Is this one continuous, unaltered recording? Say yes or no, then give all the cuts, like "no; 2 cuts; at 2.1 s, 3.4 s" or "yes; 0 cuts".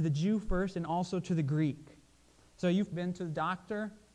no; 1 cut; at 2.9 s